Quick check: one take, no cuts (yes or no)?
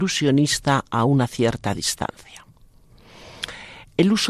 yes